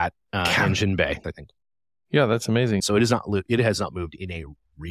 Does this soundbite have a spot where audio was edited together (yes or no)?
yes